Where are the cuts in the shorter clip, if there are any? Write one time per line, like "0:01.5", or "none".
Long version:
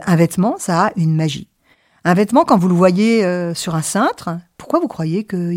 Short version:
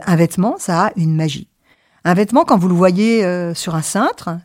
none